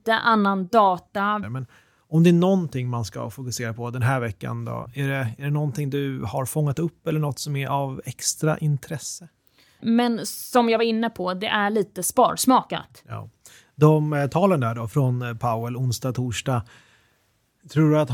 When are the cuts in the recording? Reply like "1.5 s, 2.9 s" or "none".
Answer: 1.4 s, 9.8 s